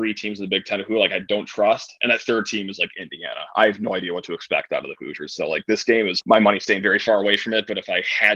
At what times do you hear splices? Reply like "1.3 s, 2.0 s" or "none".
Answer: 6.2 s